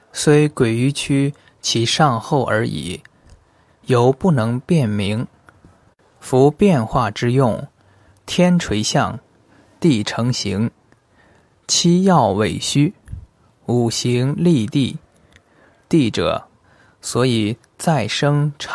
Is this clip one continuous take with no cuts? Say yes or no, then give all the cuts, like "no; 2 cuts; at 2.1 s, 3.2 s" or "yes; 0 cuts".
yes; 0 cuts